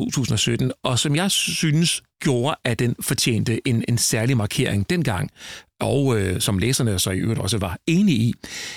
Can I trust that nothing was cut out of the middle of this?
yes; 0 cuts

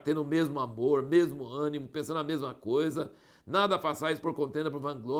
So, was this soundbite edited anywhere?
no; 0 cuts

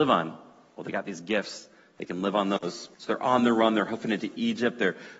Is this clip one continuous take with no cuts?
no; 1 cut; at 2.9 s

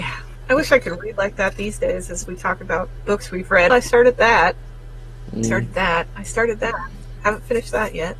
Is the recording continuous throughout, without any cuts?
no; 1 cut; at 3.7 s

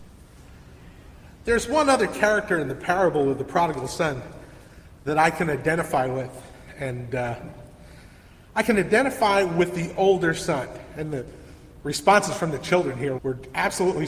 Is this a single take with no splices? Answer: no; 1 cut; at 13.2 s

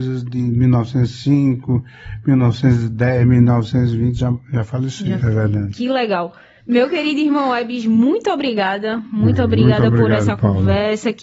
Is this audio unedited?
no; 1 cut; at 5.2 s

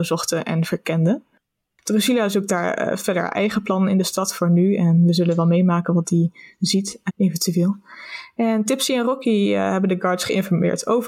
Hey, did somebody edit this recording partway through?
yes; 1 cut; at 7.1 s

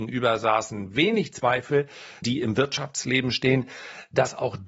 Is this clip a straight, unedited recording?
no; 1 cut; at 2.2 s

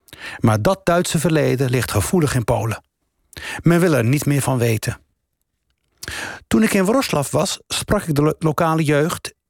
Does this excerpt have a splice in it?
no; 0 cuts

